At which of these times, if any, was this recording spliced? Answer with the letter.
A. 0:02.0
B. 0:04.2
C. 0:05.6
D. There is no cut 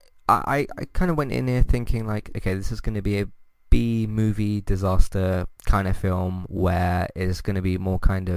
C